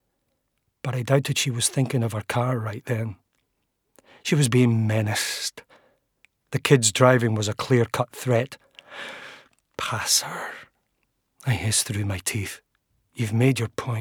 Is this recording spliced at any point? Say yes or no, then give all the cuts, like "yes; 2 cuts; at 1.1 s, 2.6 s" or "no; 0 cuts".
no; 0 cuts